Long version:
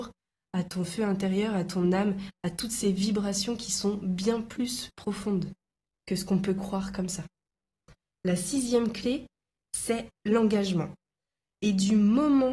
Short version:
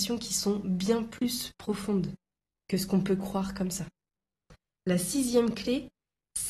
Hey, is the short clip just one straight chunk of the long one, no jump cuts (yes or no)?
yes